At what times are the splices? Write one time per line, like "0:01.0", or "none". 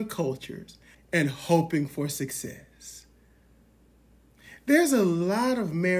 0:00.9